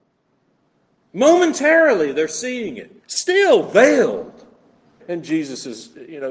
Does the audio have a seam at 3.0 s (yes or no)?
yes